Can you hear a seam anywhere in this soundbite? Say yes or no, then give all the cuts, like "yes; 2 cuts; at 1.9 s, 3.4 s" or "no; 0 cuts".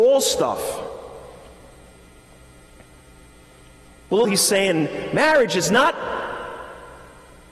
yes; 1 cut; at 4.2 s